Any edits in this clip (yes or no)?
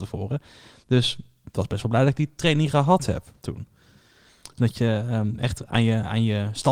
yes